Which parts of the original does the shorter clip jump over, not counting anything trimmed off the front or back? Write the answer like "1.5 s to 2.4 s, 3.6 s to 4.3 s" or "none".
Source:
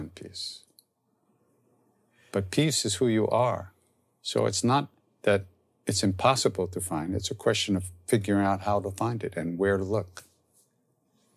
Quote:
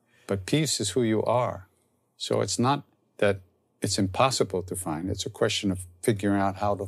none